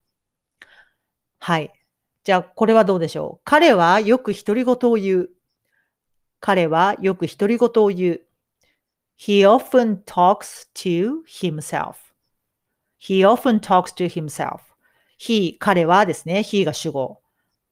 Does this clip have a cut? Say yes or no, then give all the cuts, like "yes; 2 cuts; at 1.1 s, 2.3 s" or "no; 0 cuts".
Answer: no; 0 cuts